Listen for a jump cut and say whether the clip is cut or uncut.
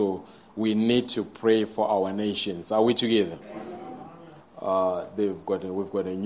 cut